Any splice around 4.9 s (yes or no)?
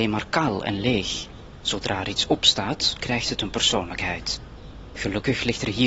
no